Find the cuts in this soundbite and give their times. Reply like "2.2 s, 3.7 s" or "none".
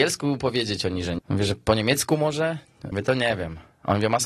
1.2 s, 2.9 s